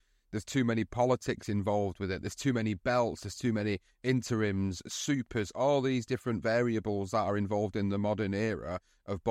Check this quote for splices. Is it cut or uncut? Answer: uncut